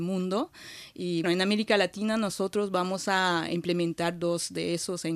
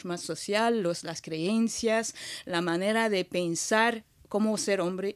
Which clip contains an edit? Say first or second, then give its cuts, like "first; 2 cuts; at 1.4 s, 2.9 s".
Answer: first; 1 cut; at 1.2 s